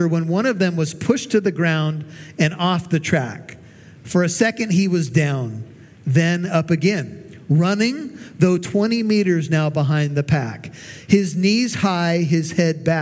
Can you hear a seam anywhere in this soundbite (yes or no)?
no